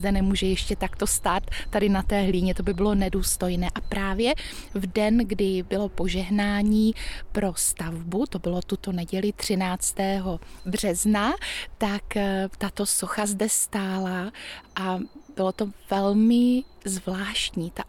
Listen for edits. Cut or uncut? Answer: uncut